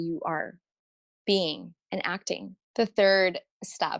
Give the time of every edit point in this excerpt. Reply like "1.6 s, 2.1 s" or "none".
2.6 s